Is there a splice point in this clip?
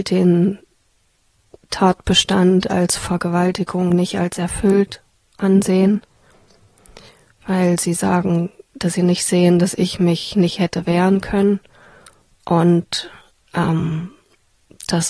no; 0 cuts

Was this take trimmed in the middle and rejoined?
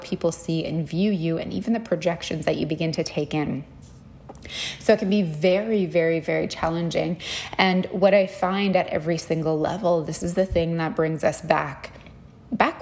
no; 0 cuts

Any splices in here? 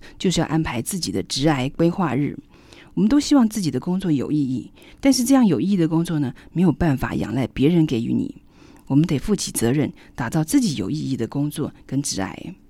no; 0 cuts

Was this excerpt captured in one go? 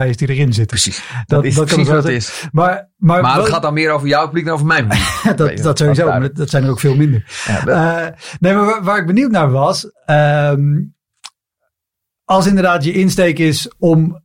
yes; 0 cuts

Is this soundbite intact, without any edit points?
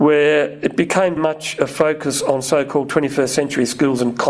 no; 1 cut; at 1.2 s

